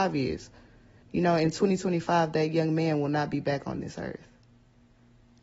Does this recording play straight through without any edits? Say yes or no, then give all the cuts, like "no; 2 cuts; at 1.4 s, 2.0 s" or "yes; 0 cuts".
no; 1 cut; at 1.0 s